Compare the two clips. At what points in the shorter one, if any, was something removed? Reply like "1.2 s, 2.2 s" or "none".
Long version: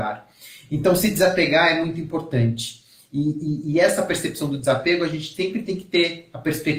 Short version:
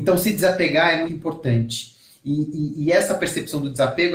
1.1 s